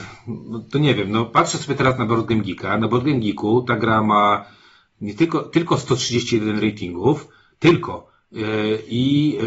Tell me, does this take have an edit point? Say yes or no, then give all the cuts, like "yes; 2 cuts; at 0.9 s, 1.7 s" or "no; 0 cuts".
no; 0 cuts